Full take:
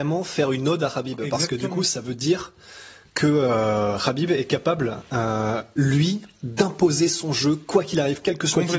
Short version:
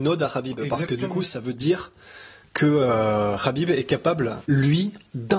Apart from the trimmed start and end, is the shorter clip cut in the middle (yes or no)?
yes